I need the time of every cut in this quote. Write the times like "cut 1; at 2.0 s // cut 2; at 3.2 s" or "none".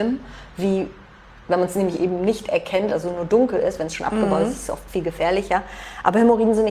none